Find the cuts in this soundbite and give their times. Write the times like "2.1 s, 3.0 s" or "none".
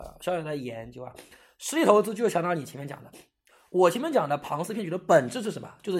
none